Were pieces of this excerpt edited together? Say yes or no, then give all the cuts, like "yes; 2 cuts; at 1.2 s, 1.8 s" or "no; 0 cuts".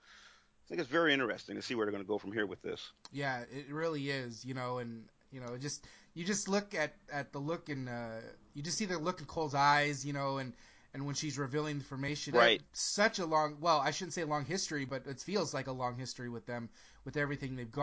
yes; 1 cut; at 12.3 s